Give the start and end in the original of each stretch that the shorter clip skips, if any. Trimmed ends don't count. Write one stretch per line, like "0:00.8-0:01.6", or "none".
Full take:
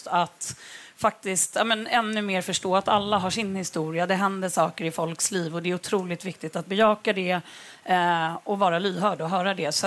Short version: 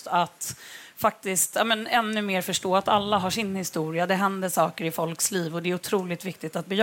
none